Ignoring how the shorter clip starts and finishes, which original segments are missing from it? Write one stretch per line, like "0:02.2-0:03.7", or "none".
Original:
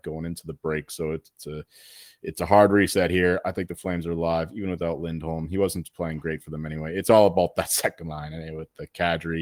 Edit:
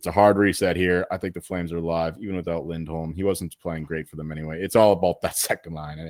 none